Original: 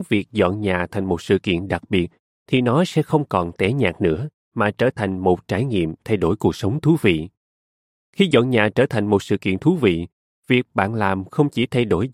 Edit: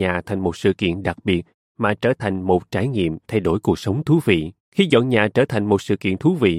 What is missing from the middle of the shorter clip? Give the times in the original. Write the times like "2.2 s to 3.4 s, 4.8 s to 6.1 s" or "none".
2.3 s to 4.4 s, 7.4 s to 8.0 s